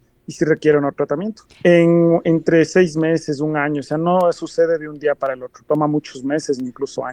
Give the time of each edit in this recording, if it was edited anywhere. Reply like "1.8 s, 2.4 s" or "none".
1.6 s